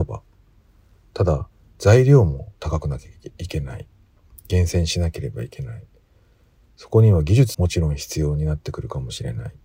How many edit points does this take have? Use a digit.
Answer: 1